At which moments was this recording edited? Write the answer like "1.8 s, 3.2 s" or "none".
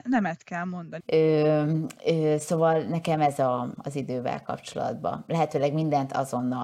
1.0 s, 3.7 s